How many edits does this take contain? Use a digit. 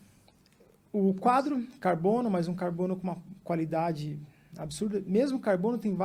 0